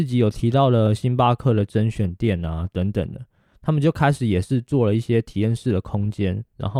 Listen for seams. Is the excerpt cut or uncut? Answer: uncut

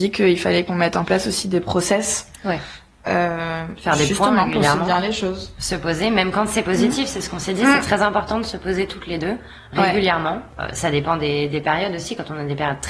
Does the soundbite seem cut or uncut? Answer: uncut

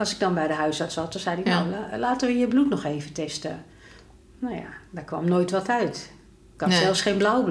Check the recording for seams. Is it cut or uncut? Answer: uncut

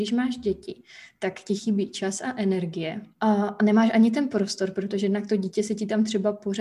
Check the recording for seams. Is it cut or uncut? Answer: cut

